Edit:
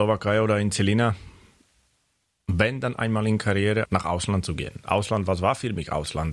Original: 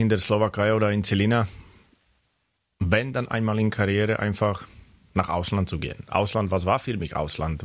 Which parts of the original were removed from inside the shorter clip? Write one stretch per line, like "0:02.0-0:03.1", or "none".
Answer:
0:04.2-0:05.1

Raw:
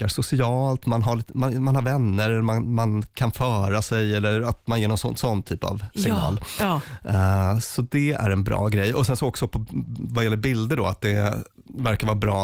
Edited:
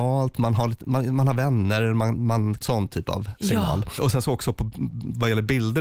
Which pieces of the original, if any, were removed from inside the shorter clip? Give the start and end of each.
0:03.1-0:05.2
0:06.5-0:08.9

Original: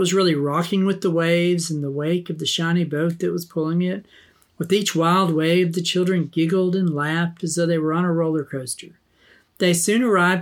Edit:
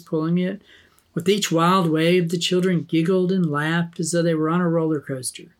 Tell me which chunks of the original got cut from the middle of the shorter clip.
none

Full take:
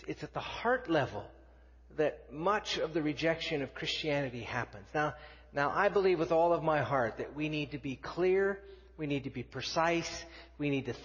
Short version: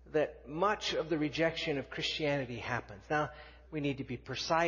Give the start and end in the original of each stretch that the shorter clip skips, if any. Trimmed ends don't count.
0:05.5-0:08.9

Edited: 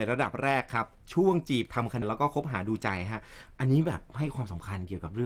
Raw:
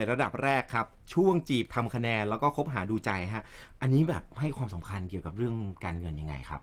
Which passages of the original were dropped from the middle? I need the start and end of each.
0:02.0-0:02.2

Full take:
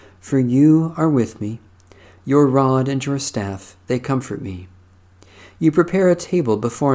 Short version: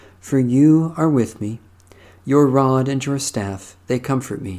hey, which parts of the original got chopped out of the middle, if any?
none

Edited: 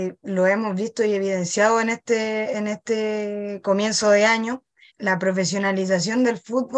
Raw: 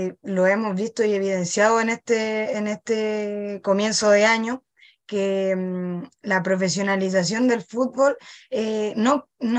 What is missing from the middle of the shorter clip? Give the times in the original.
0:04.9-0:06.1

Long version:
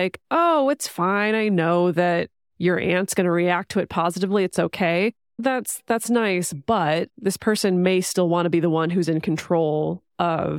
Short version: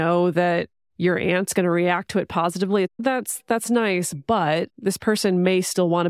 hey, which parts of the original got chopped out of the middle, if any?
0:04.5-0:05.2

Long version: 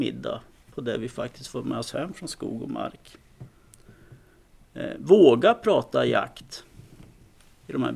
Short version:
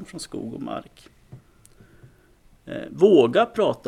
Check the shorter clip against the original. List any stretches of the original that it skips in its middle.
none

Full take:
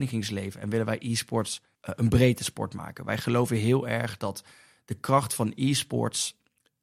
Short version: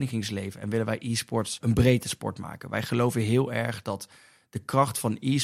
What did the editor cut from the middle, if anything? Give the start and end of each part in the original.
0:01.6-0:02.0

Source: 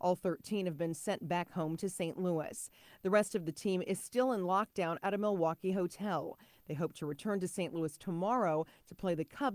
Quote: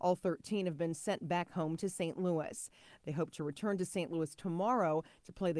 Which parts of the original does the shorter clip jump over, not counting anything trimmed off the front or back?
0:03.0-0:06.6

